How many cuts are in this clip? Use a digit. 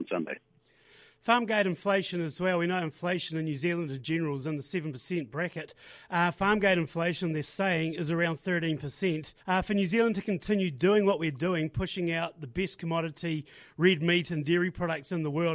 1